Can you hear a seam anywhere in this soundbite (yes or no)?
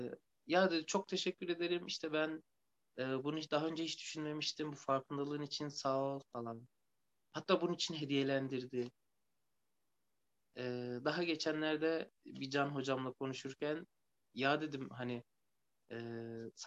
yes